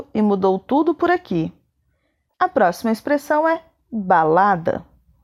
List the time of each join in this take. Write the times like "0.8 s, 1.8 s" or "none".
2.3 s